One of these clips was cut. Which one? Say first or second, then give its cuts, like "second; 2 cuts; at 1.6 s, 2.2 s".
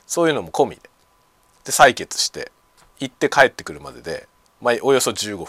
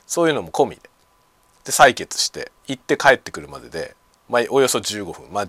second; 1 cut; at 2.6 s